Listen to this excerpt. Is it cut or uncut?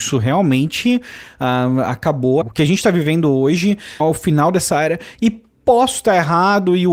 cut